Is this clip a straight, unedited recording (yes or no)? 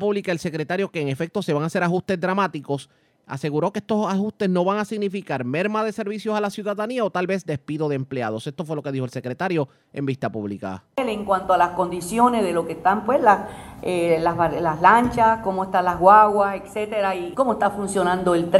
no